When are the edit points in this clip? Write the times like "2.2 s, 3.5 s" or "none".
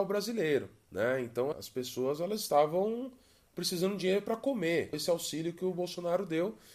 1.5 s, 4.9 s